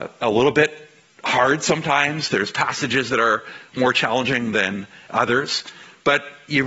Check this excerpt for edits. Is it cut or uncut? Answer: uncut